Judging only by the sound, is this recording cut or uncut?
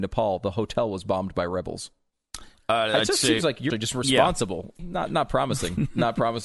cut